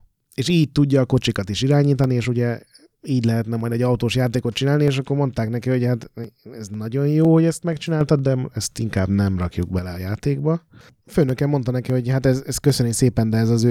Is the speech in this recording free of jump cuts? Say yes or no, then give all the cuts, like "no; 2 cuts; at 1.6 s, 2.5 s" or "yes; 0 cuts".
yes; 0 cuts